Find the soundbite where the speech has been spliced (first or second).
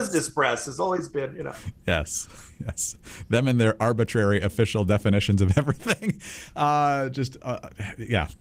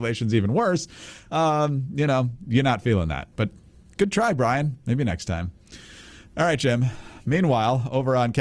second